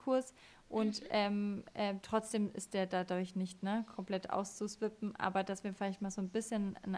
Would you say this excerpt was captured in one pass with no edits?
yes; 0 cuts

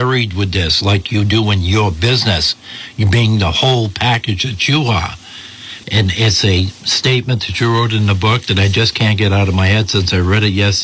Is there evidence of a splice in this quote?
yes; 1 cut; at 5.8 s

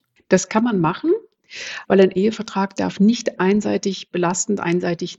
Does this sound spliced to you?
yes; 1 cut; at 1.8 s

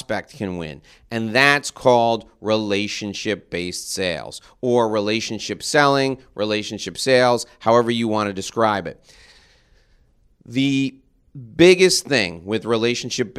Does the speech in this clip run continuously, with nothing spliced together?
yes; 0 cuts

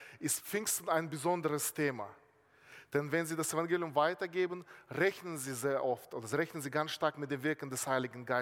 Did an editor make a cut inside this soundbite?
no; 0 cuts

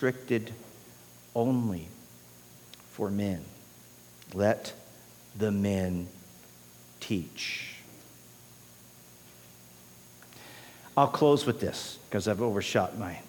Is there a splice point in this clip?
no; 0 cuts

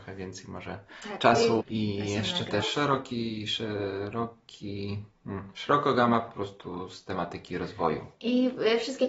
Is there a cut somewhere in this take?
yes; 2 cuts; at 1.6 s, 2.6 s

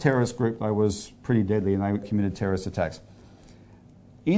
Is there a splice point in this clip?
yes; 1 cut; at 2.0 s

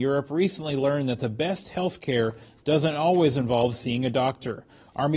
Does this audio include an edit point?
no; 0 cuts

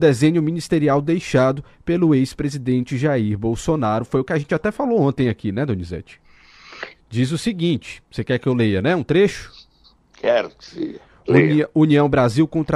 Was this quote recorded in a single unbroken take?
no; 1 cut; at 7.0 s

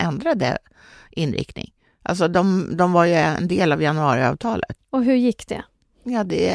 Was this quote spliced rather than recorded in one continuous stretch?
yes; 1 cut; at 4.8 s

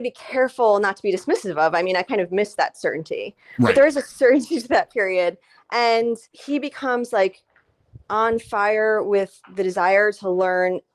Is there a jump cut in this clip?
no; 0 cuts

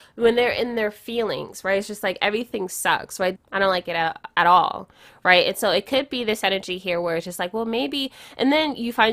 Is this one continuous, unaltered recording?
no; 1 cut; at 3.4 s

